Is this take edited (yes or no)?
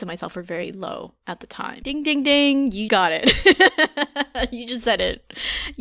yes